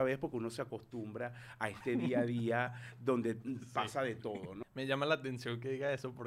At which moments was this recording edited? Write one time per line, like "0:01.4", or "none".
0:04.6